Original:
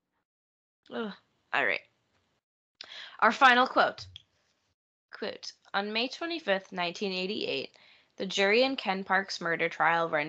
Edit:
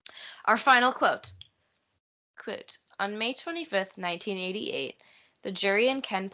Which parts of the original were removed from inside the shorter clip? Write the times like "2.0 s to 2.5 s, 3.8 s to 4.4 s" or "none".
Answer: none